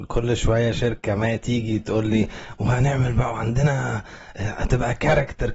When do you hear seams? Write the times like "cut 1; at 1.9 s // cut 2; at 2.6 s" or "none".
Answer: none